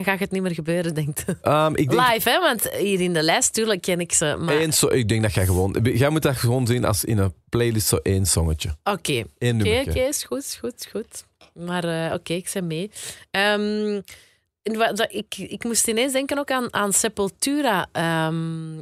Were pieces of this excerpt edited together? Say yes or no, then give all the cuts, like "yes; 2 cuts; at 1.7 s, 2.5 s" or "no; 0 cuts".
no; 0 cuts